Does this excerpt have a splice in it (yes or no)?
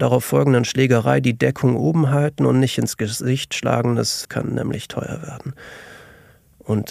yes